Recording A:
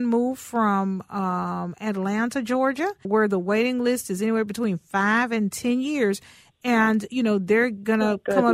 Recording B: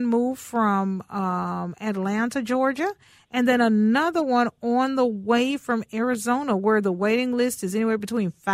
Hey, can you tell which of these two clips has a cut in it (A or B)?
A